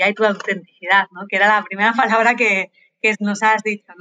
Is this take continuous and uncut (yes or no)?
yes